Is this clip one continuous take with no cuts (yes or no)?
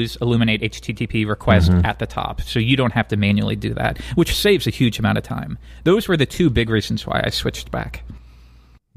yes